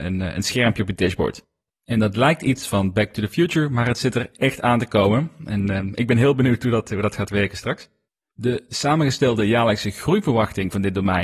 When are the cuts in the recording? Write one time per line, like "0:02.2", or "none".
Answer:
none